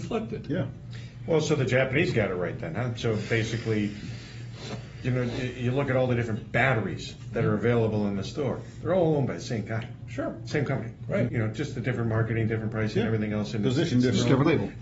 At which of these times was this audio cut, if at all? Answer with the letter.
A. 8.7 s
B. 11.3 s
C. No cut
B